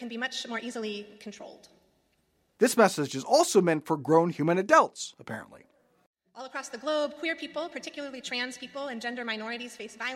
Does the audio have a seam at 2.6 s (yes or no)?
yes